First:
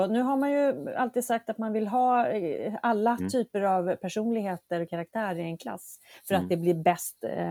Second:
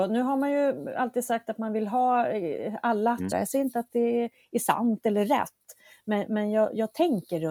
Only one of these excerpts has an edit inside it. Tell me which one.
second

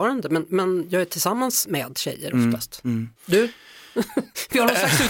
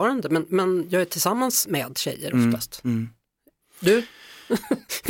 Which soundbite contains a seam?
first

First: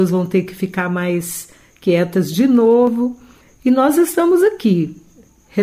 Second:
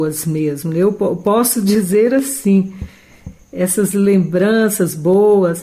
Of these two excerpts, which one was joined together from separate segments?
second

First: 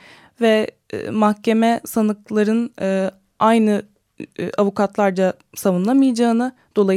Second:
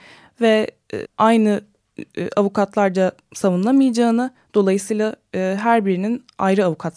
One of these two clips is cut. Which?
second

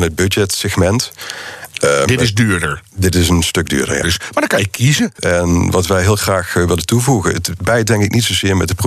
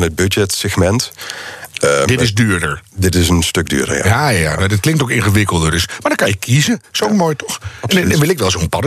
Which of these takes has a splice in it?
first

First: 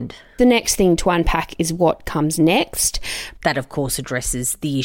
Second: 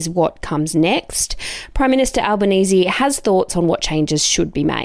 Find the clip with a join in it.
first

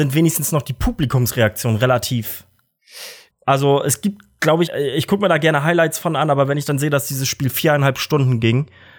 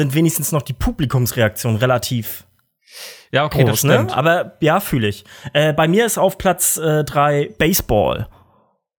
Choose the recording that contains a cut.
first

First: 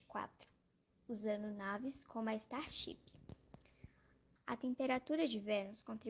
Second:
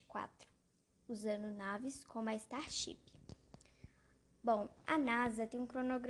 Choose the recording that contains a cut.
first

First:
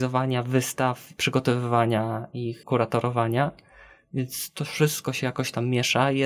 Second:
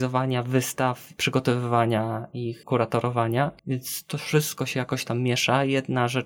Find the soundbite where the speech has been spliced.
second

